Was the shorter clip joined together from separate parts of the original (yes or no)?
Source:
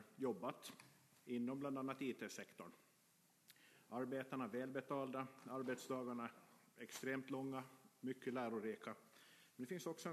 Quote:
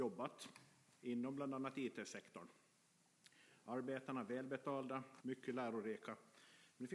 yes